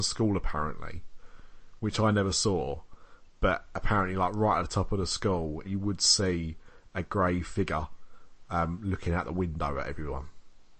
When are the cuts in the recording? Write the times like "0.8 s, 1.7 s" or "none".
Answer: 5.6 s